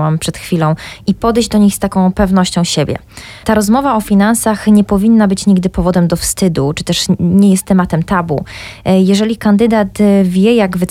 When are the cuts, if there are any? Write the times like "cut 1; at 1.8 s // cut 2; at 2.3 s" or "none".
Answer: none